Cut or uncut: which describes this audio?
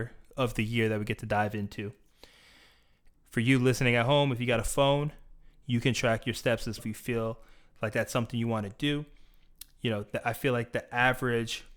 cut